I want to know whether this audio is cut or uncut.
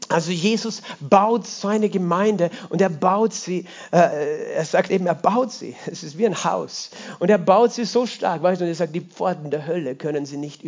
uncut